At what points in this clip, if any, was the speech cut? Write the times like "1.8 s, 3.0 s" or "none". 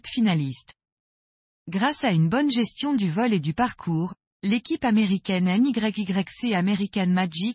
none